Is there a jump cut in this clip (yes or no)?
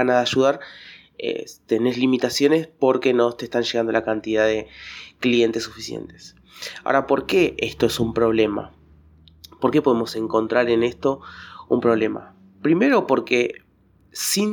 no